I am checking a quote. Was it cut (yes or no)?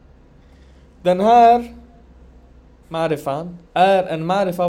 yes